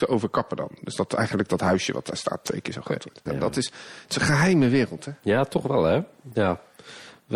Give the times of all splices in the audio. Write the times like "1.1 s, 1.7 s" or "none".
3.3 s

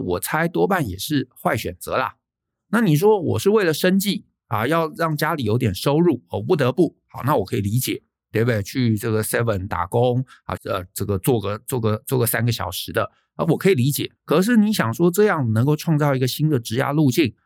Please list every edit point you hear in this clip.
10.6 s, 14.2 s

